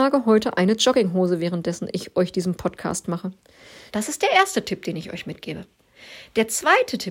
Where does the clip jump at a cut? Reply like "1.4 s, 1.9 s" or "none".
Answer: 3.9 s